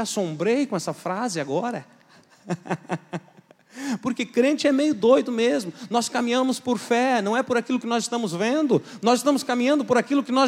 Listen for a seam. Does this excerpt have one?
no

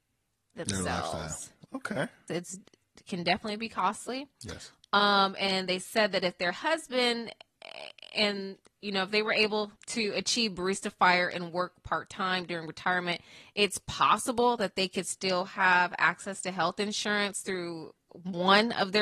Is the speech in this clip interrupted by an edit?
yes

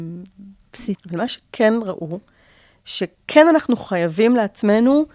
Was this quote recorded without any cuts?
no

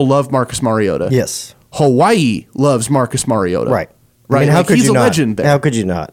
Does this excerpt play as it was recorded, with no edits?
yes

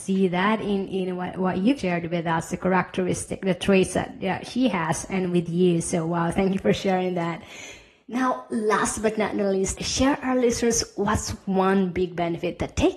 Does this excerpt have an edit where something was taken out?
yes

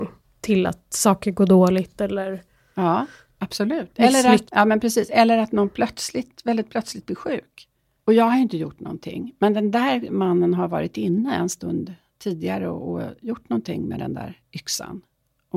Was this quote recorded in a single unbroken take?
no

